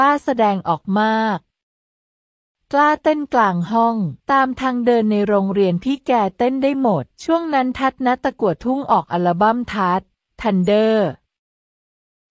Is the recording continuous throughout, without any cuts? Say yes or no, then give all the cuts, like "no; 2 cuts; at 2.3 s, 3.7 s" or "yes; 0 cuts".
no; 2 cuts; at 4.2 s, 7.1 s